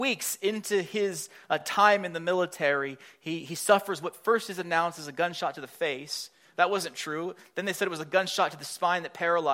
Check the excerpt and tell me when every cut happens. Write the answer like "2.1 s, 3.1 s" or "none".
none